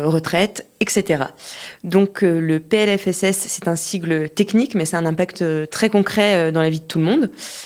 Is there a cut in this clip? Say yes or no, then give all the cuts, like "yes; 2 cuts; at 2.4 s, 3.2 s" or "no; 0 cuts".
no; 0 cuts